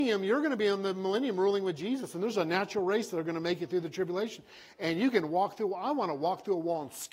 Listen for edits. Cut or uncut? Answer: uncut